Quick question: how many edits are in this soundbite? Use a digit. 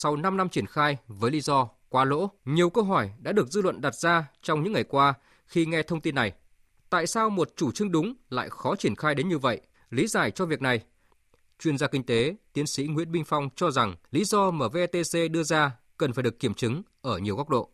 3